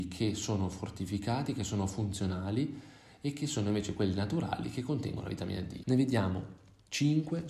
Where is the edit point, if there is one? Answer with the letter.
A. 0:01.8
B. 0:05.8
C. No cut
B